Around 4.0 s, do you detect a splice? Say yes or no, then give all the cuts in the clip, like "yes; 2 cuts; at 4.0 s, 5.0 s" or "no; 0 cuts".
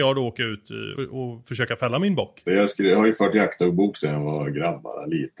no; 2 cuts; at 1.0 s, 2.5 s